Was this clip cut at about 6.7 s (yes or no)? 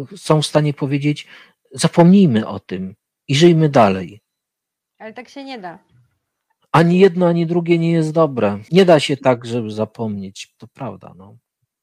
no